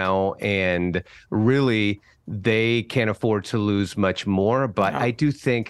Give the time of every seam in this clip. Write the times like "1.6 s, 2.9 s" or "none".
none